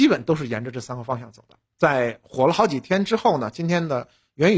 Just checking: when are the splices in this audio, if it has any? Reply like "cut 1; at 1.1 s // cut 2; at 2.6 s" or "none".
cut 1; at 1.7 s

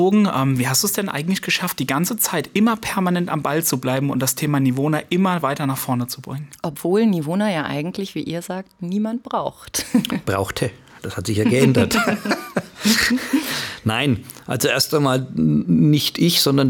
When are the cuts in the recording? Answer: none

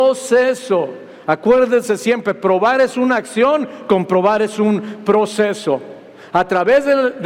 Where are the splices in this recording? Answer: none

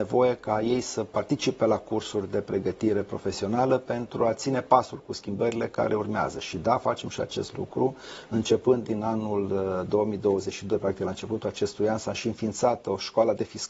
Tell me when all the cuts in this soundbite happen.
none

